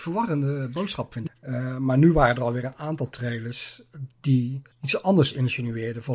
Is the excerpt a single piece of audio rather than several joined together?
no; 2 cuts; at 1.3 s, 4.7 s

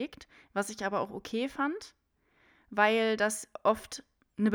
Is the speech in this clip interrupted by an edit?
no; 0 cuts

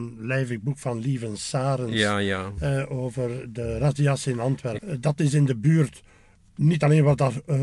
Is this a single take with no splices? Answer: no; 1 cut; at 4.8 s

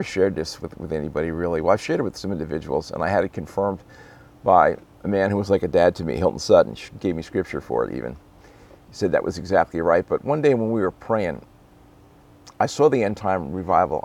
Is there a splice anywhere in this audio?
no; 0 cuts

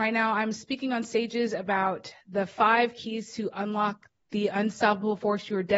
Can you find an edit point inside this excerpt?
no; 0 cuts

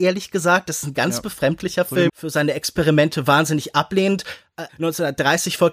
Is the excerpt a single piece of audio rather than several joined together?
no; 2 cuts; at 2.1 s, 4.7 s

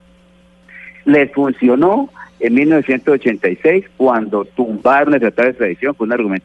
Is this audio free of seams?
yes; 0 cuts

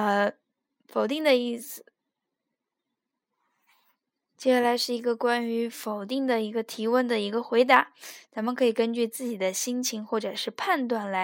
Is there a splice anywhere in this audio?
no; 0 cuts

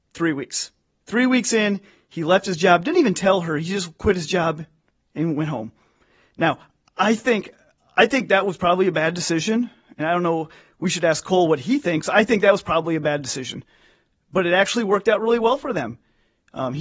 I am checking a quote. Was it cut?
no; 0 cuts

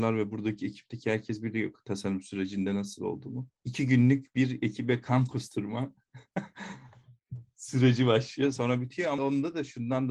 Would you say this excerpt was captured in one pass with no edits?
no; 1 cut; at 9.2 s

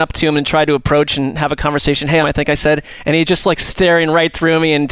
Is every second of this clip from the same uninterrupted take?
no; 1 cut; at 2.2 s

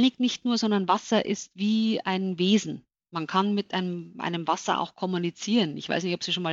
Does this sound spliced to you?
no; 0 cuts

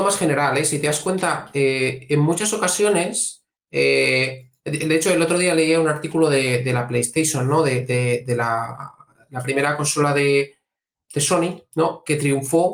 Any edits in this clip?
no; 0 cuts

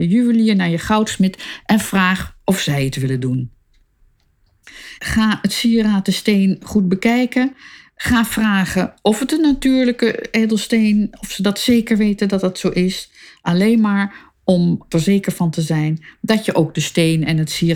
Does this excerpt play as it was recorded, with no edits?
no; 1 cut; at 5.0 s

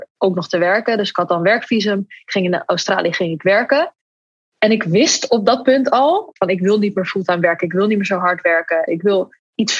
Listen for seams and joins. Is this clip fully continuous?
no; 2 cuts; at 6.4 s, 8.9 s

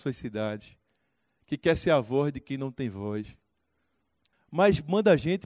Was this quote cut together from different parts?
yes; 1 cut; at 4.3 s

